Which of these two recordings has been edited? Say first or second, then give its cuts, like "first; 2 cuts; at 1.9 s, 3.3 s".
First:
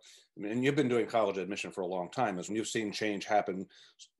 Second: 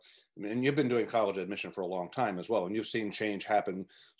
first; 1 cut; at 2.5 s